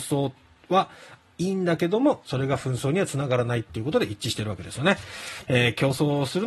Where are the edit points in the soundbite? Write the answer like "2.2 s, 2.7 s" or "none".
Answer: 5.4 s